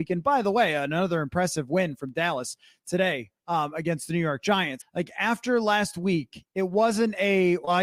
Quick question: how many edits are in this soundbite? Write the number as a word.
one